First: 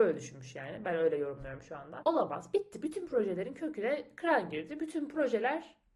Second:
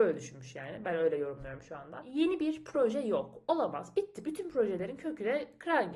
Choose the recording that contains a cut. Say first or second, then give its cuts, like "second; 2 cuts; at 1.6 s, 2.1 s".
first; 1 cut; at 2.0 s